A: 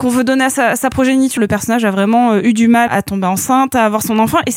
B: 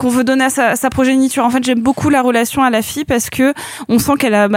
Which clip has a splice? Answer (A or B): A